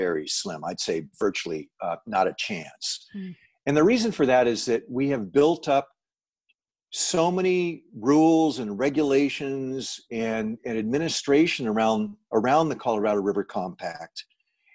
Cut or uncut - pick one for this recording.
uncut